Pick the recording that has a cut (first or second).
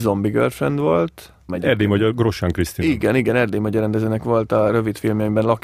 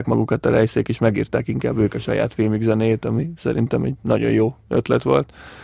first